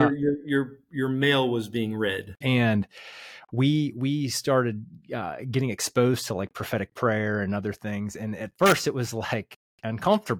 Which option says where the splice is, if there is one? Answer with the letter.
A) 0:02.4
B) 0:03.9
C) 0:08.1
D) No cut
A